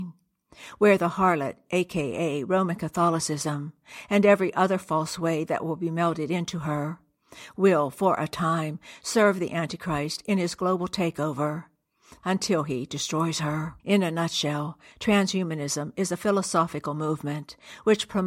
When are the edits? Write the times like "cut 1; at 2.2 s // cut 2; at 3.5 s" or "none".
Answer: cut 1; at 12.2 s // cut 2; at 13.8 s